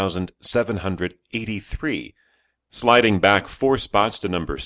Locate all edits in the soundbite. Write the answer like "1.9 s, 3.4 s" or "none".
2.6 s